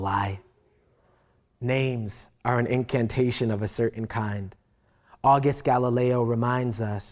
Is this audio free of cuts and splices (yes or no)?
yes